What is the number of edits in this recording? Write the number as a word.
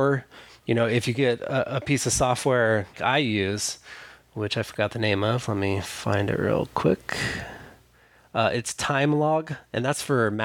one